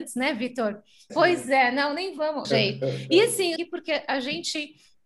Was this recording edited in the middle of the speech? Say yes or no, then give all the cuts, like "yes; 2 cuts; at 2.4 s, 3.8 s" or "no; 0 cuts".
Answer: yes; 3 cuts; at 1.1 s, 2.4 s, 3.6 s